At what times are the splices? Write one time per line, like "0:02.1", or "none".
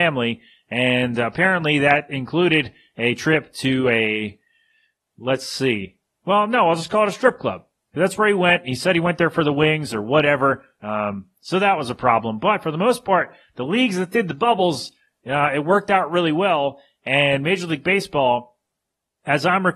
none